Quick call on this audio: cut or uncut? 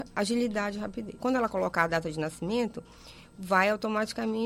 cut